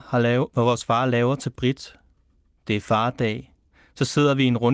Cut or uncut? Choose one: uncut